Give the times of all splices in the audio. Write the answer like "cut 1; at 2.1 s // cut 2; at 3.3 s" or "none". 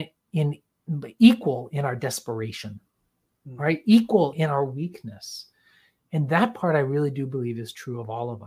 cut 1; at 4.3 s